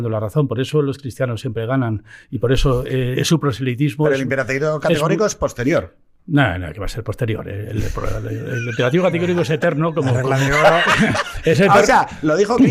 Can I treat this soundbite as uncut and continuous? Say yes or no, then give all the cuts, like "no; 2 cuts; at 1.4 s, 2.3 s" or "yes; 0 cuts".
yes; 0 cuts